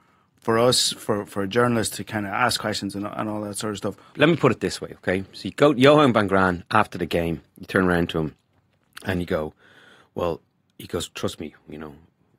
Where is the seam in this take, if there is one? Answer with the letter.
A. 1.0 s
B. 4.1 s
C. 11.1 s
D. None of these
B